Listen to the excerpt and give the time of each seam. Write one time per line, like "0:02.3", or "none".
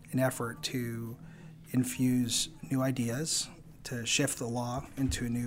none